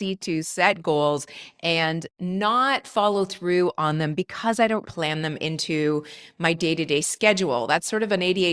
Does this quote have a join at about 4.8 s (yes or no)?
yes